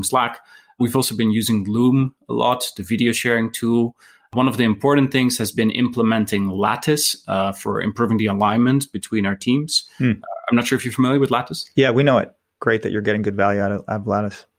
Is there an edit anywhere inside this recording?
no; 0 cuts

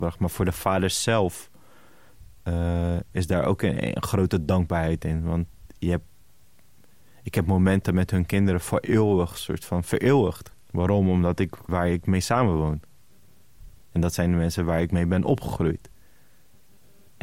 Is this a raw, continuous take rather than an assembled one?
no; 3 cuts; at 10.5 s, 11.7 s, 13.8 s

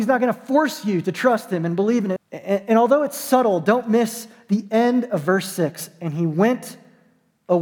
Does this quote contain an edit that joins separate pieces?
yes; 1 cut; at 2.2 s

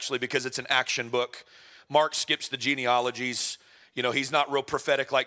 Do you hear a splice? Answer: no; 0 cuts

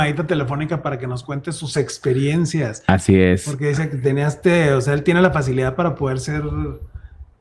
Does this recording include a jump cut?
no; 0 cuts

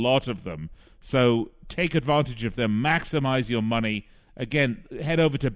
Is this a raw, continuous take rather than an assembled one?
yes; 0 cuts

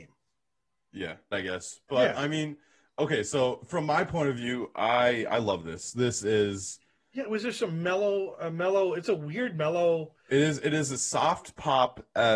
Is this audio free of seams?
no; 1 cut; at 1.3 s

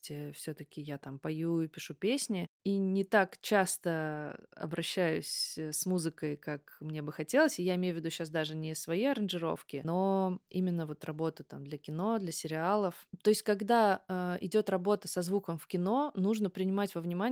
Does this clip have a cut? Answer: no; 0 cuts

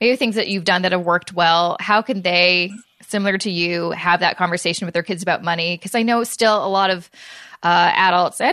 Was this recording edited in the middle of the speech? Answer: no; 0 cuts

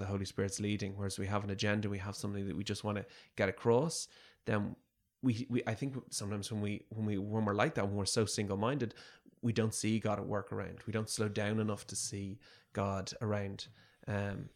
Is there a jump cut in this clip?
no; 0 cuts

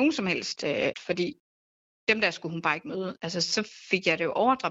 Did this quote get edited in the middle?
yes; 1 cut; at 0.9 s

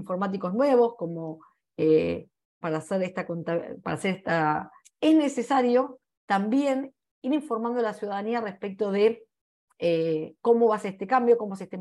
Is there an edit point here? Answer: yes; 2 cuts; at 2.6 s, 4.9 s

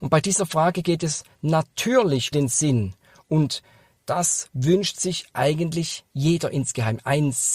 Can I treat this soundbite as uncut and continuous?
no; 1 cut; at 2.3 s

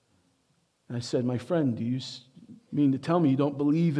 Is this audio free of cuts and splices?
yes; 0 cuts

